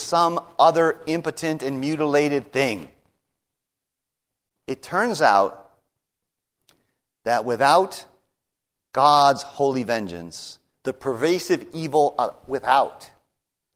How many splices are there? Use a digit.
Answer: 1